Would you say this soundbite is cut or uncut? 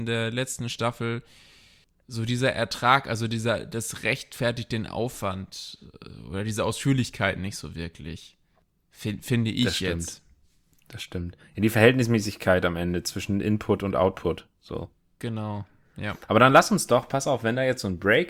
uncut